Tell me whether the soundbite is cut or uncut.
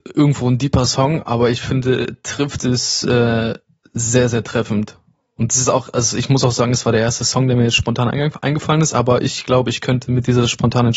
uncut